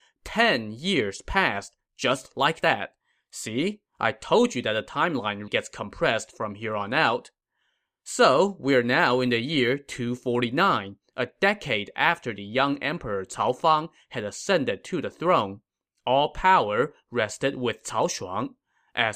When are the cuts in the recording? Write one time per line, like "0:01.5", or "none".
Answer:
0:05.5